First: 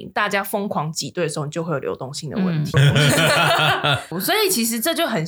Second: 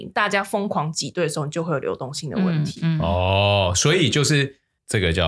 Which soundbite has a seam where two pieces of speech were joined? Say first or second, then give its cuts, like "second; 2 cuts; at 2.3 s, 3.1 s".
first; 1 cut; at 2.7 s